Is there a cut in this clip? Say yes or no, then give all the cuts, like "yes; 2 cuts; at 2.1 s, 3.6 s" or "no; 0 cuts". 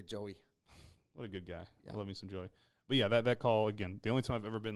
no; 0 cuts